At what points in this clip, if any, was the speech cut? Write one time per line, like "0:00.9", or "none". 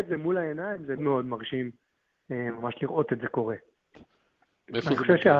0:01.0
0:03.9